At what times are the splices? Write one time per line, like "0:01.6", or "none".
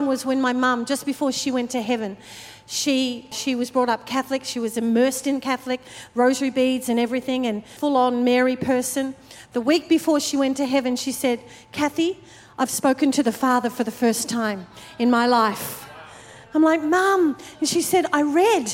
0:03.3
0:07.8

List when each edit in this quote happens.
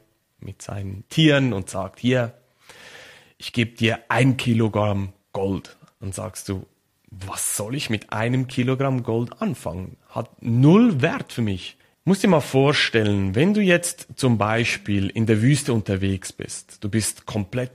0:11.9

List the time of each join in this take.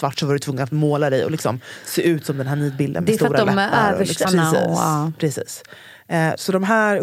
0:04.2

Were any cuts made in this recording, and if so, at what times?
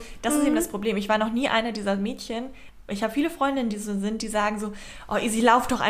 none

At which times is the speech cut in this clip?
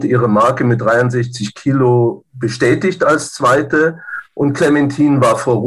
none

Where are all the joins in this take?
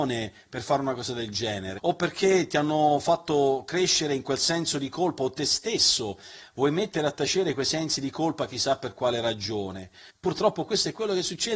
0:01.8
0:10.1

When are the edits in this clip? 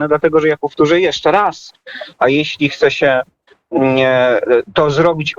0:02.2

